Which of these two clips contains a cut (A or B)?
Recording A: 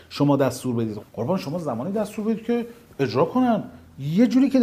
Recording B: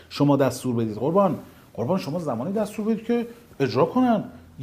A